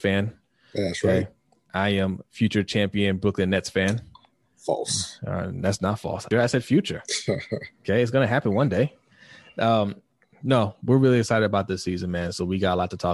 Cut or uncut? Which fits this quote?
cut